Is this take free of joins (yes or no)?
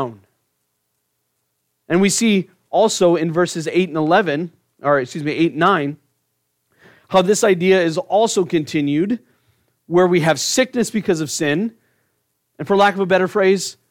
yes